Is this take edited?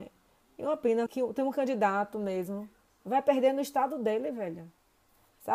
yes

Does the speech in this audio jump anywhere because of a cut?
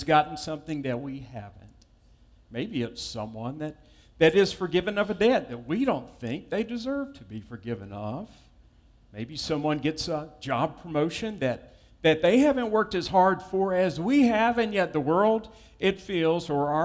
no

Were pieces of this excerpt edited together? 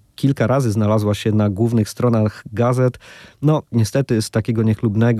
no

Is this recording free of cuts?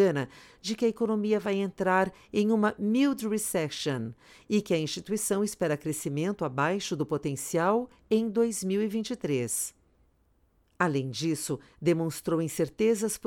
yes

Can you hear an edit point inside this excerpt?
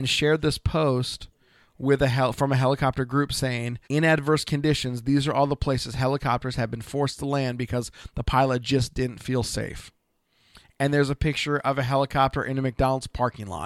yes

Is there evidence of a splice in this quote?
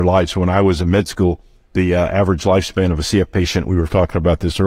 no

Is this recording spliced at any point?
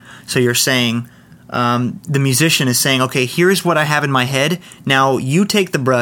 no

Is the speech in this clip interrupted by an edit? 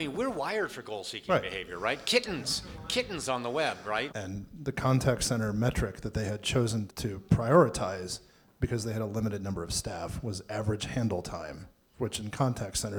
yes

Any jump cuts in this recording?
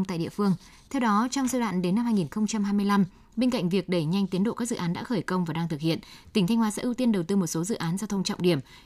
no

